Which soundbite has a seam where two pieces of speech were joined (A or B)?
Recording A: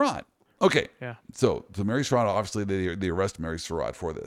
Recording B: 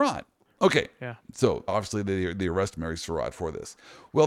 B